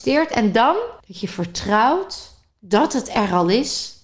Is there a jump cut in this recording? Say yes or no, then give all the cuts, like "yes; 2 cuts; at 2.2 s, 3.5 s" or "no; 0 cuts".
yes; 1 cut; at 1.0 s